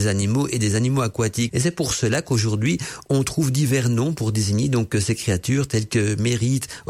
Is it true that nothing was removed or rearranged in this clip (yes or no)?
no